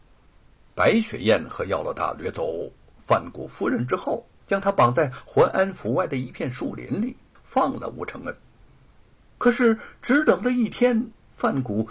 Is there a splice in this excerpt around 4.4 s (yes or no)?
yes